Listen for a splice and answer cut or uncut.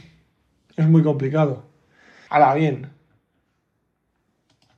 cut